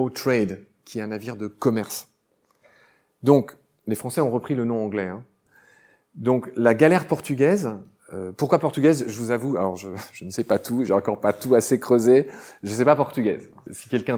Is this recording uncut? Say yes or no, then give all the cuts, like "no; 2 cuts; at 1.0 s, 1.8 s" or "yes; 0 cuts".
yes; 0 cuts